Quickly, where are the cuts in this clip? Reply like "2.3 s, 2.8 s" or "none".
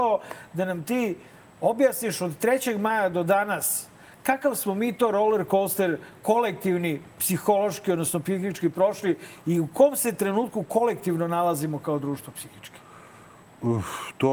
none